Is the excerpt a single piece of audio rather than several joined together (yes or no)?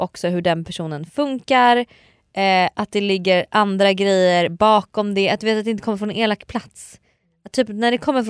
yes